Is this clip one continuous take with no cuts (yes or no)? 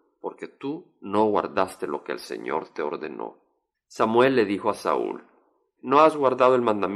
no